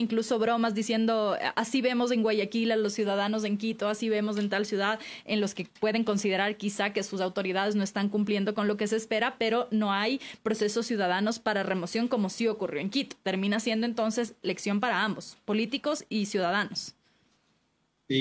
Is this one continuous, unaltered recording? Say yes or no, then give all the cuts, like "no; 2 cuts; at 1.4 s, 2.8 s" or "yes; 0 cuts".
yes; 0 cuts